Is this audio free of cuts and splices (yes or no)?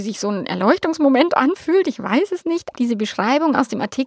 no